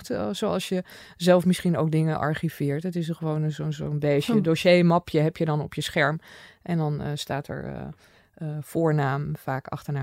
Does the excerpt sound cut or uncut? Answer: uncut